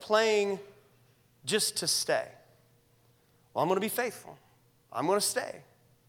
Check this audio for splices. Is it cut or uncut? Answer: uncut